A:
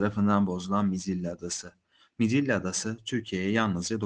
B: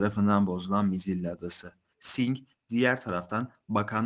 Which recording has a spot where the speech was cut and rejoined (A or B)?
B